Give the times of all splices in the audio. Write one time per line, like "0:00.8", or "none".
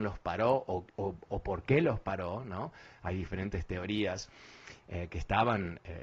0:04.8